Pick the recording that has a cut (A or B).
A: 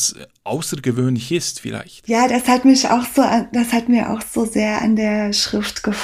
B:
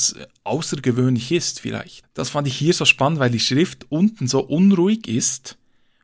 B